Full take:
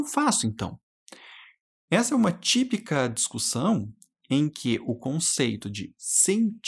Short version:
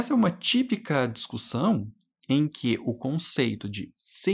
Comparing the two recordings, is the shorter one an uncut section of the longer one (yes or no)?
yes